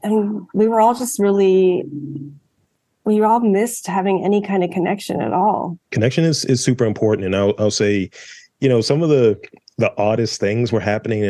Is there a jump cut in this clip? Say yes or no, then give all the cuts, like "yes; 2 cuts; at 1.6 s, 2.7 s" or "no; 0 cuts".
yes; 1 cut; at 5.8 s